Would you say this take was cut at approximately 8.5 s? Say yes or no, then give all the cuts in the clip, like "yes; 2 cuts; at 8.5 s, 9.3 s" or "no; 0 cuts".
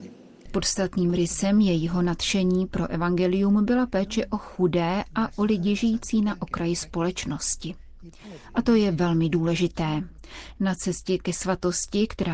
no; 0 cuts